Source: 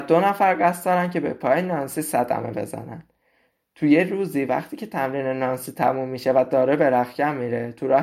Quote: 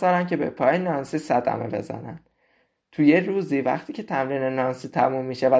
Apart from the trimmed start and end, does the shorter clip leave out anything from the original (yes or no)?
no